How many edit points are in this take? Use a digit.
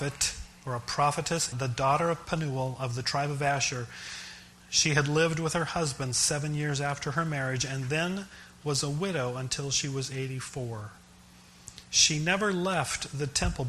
2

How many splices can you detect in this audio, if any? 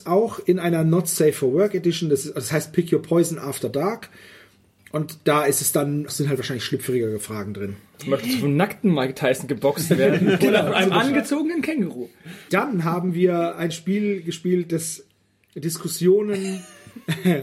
2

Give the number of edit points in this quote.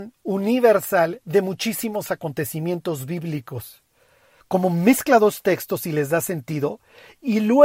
1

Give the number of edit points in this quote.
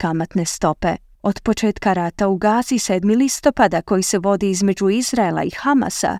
1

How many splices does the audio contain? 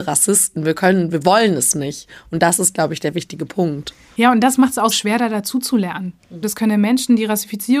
2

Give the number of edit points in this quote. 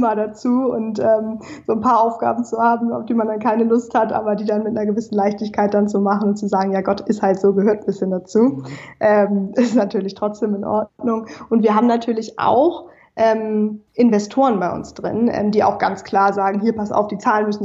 1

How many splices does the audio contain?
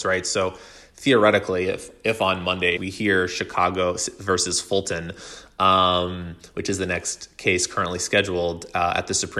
1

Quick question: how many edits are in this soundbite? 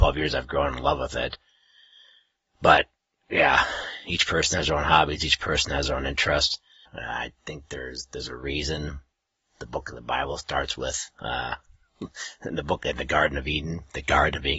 1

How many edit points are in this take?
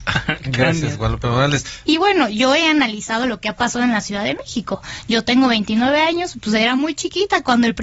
1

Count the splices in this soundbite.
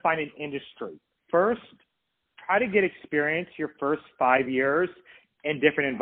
1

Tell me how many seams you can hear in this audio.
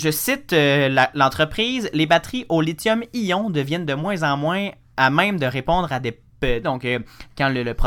1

